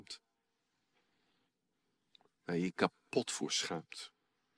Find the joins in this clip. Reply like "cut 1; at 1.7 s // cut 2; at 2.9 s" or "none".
none